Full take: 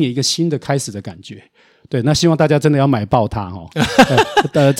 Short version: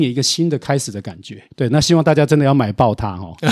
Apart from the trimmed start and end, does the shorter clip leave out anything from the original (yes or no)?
yes